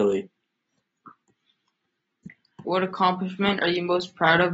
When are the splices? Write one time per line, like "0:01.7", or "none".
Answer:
0:02.6